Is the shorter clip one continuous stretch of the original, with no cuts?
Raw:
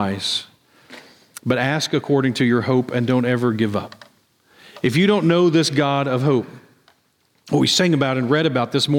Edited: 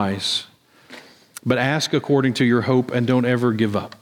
yes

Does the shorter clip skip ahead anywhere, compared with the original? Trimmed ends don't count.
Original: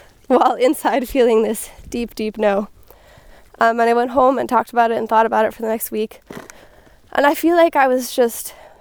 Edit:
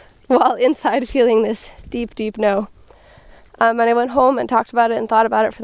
no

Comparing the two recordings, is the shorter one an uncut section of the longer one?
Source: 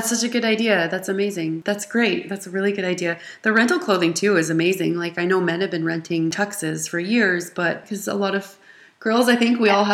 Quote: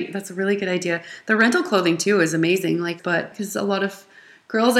no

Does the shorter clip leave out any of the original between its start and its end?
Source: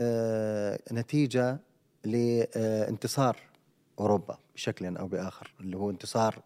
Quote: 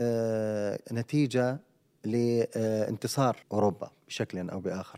yes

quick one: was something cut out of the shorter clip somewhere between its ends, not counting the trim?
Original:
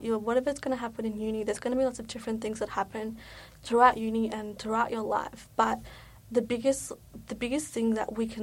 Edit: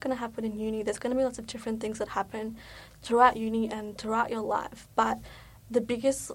no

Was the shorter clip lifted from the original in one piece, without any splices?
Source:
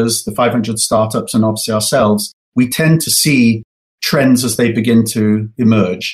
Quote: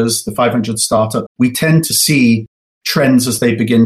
no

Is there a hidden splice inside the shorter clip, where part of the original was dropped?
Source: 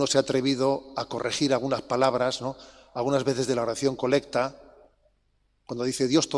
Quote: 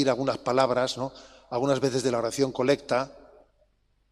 no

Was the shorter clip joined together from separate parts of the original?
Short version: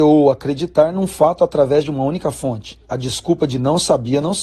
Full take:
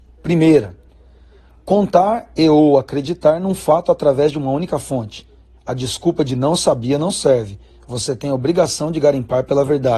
yes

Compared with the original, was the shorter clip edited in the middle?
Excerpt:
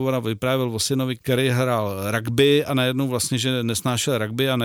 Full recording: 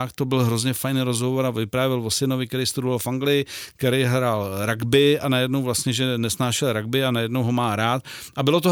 yes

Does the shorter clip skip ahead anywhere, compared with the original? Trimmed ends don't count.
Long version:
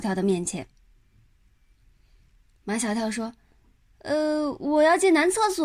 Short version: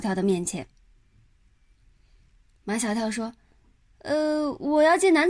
no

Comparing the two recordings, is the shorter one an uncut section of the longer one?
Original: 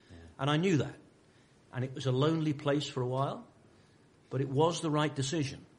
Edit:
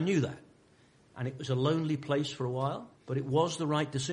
no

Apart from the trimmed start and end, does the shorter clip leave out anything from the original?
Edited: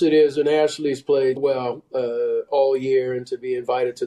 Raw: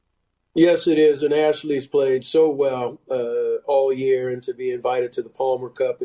yes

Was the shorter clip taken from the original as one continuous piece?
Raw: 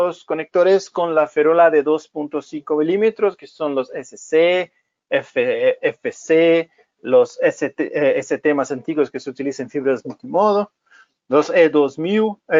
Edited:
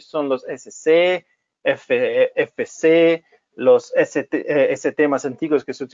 yes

